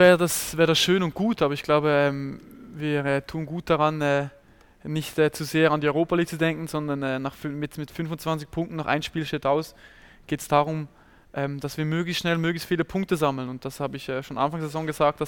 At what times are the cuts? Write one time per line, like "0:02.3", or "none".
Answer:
none